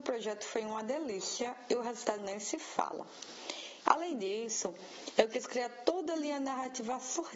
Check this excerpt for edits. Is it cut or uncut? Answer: cut